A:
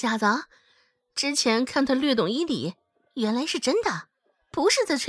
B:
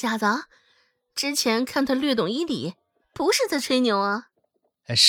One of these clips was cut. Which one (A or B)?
B